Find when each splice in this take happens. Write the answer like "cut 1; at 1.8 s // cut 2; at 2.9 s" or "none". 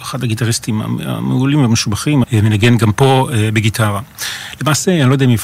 cut 1; at 2.2 s